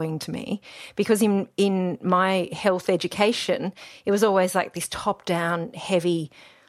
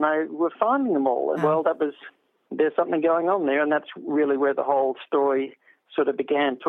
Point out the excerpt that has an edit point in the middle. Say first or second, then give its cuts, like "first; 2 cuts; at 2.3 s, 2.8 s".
second; 1 cut; at 1.4 s